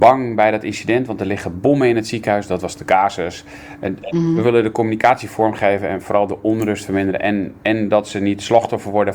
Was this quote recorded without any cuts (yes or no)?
yes